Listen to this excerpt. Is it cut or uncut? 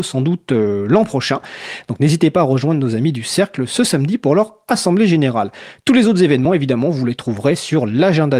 uncut